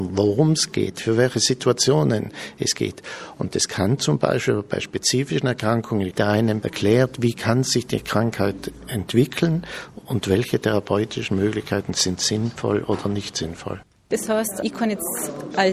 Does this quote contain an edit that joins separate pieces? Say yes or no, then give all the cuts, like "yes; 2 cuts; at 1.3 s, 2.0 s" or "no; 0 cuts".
yes; 2 cuts; at 6.1 s, 14.0 s